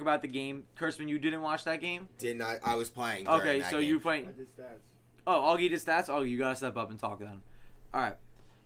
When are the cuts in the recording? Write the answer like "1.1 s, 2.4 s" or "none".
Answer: 4.2 s